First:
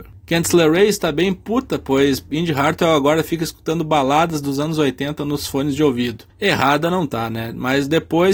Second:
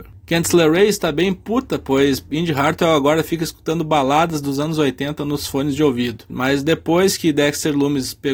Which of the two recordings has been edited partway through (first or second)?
second